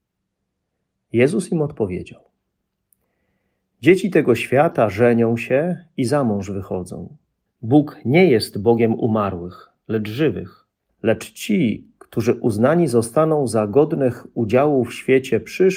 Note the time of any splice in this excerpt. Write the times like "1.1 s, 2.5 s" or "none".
7.5 s, 10.9 s